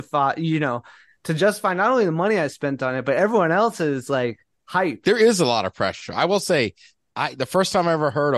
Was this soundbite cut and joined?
yes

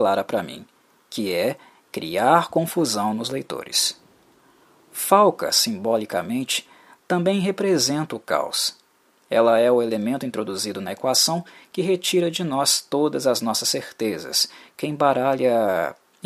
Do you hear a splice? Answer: no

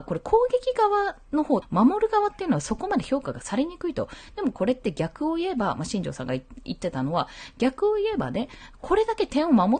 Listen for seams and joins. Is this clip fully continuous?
no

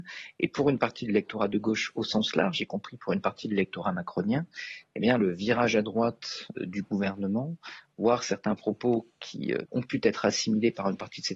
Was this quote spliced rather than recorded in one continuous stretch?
yes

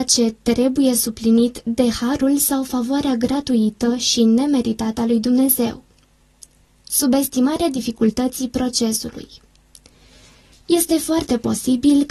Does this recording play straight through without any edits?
yes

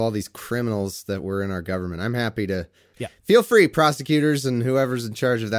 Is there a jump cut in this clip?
yes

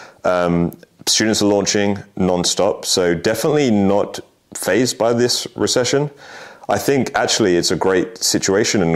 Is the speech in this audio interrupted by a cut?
no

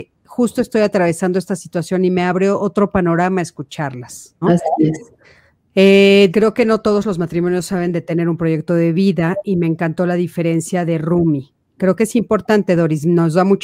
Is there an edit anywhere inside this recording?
yes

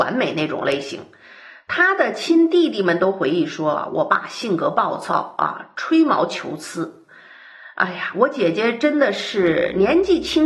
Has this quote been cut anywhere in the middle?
no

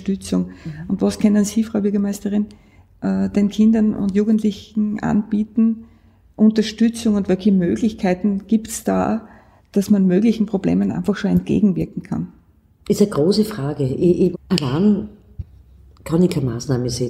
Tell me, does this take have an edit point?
yes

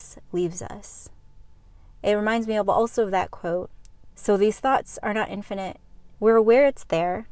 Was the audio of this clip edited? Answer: yes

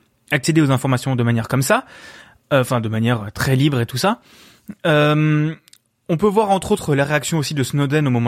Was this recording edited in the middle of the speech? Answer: no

